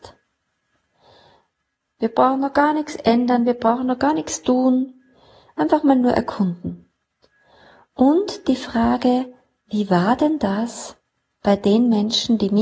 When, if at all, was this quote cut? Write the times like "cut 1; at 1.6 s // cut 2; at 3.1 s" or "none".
cut 1; at 1.9 s